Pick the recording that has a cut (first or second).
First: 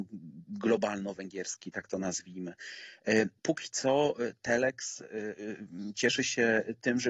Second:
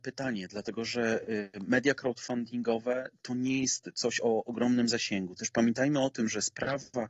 first